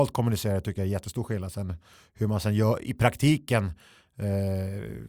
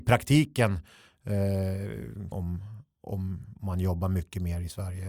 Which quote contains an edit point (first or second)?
second